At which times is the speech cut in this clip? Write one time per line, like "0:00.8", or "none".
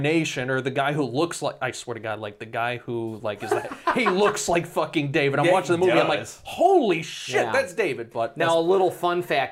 none